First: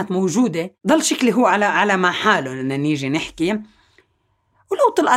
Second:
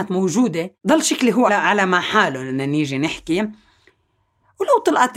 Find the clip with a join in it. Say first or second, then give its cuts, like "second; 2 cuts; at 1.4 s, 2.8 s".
second; 1 cut; at 1.5 s